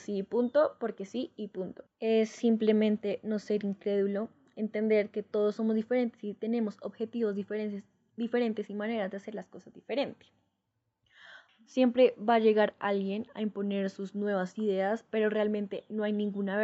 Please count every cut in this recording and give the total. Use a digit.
3